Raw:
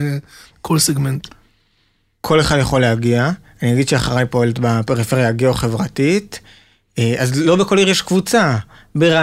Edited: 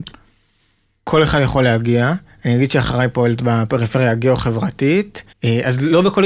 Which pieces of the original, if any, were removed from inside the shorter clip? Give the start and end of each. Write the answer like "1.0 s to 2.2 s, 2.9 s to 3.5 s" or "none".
6.5 s to 6.9 s